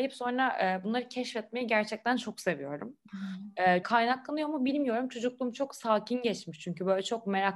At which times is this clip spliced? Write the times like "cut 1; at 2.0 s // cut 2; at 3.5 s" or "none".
cut 1; at 3.8 s